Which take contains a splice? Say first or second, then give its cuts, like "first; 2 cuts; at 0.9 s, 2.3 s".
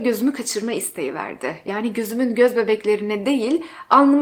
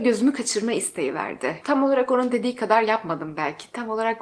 second; 1 cut; at 1.6 s